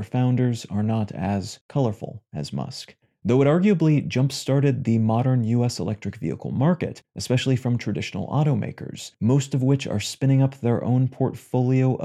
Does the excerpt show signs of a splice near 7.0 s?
yes; 1 cut; at 7.0 s

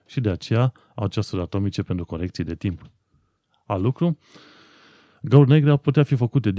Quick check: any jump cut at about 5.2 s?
no; 0 cuts

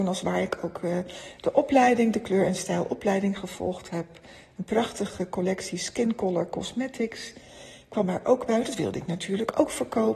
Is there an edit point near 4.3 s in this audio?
no; 0 cuts

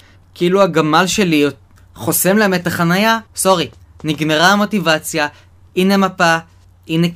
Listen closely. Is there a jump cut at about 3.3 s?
yes; 1 cut; at 3.3 s

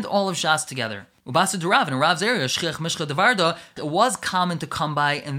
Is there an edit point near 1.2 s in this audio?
yes; 2 cuts; at 1.2 s, 3.8 s

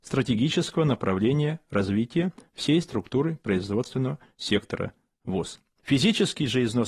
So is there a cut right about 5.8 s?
yes; 1 cut; at 5.8 s

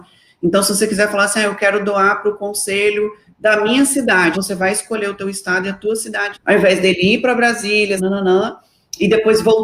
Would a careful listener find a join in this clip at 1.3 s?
no; 3 cuts; at 4.3 s, 6.3 s, 8.0 s

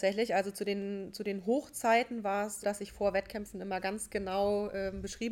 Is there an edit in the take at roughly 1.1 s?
no; 1 cut; at 2.6 s

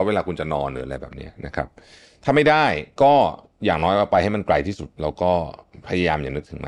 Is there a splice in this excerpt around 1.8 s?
no; 0 cuts

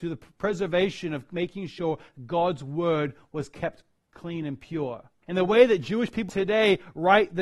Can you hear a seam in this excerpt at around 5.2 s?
yes; 2 cuts; at 5.2 s, 6.3 s

